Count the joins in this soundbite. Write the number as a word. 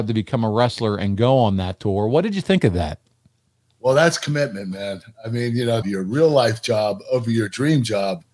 one